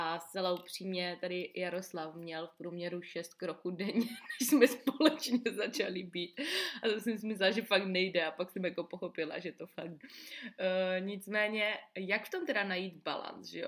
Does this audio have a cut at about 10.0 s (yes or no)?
yes